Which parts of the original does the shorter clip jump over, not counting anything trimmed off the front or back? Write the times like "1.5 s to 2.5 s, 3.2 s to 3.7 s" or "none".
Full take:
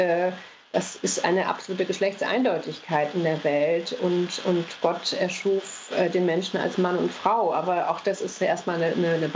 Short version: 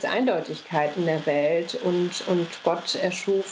none